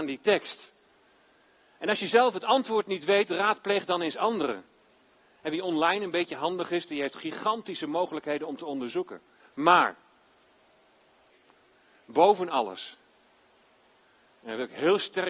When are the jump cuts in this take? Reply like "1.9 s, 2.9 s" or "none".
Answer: 9.4 s